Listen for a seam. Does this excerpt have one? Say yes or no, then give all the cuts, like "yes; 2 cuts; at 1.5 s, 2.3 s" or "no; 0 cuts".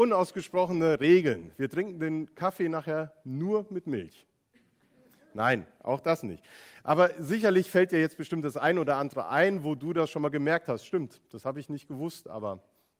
no; 0 cuts